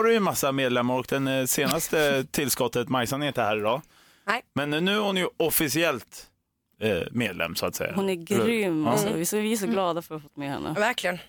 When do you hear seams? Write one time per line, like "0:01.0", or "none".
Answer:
none